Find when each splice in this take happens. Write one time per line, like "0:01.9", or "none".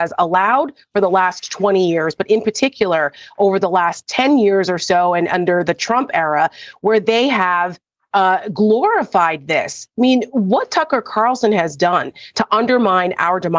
none